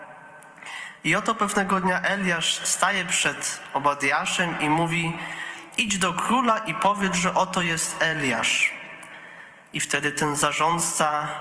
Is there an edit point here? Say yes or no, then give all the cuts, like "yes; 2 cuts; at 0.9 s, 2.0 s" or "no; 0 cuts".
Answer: no; 0 cuts